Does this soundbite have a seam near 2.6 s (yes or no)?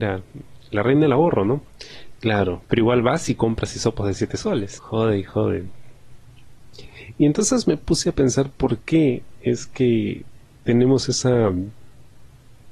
yes